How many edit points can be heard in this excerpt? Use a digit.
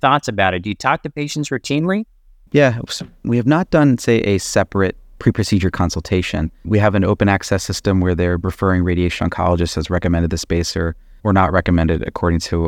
0